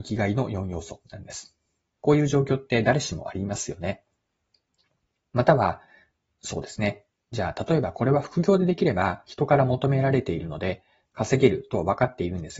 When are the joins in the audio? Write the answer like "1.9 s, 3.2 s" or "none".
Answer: 2.0 s

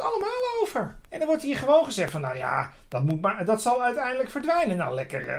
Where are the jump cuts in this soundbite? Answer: 1.0 s

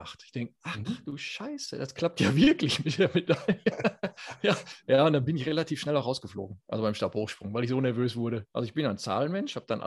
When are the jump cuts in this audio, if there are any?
8.5 s

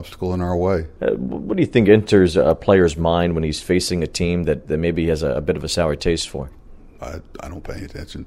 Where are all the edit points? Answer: 1.0 s, 7.0 s

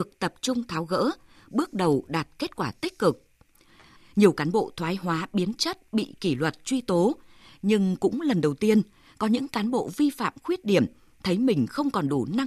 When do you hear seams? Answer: 4.0 s

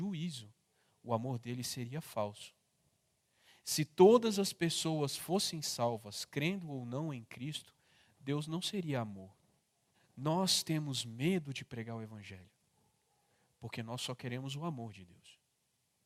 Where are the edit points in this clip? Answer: 9.9 s

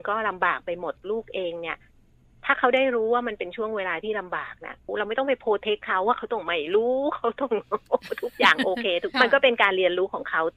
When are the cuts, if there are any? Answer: 9.1 s

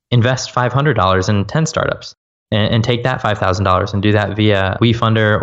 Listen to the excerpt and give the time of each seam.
none

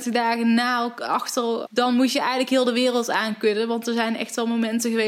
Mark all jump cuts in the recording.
1.7 s

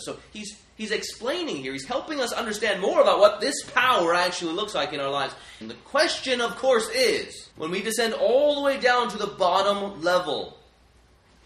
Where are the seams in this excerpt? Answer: 5.6 s, 7.5 s

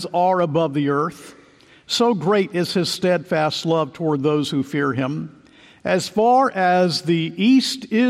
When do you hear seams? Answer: none

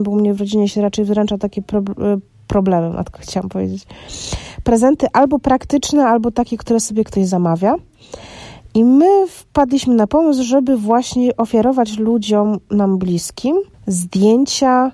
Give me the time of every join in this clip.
13.7 s

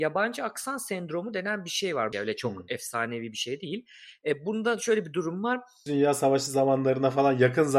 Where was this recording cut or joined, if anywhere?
2.1 s, 5.9 s

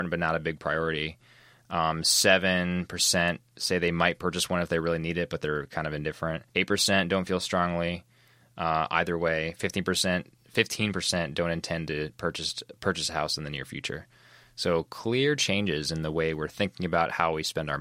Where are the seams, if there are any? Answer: 6.5 s

